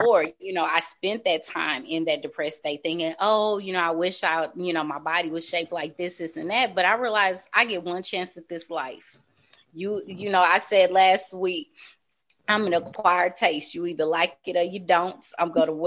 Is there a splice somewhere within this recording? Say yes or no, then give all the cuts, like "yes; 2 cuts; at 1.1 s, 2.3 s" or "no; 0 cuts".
no; 0 cuts